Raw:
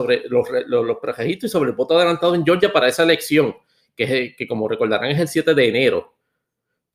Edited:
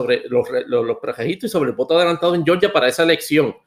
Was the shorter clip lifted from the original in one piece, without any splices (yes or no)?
yes